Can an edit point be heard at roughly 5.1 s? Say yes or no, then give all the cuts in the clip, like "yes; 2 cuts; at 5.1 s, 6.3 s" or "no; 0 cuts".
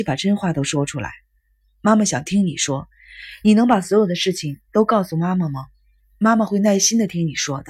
no; 0 cuts